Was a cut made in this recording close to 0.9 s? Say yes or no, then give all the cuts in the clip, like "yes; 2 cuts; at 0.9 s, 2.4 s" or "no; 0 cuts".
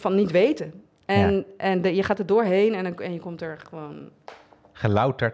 no; 0 cuts